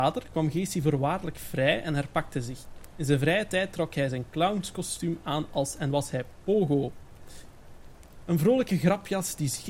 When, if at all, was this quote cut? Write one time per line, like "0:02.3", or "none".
none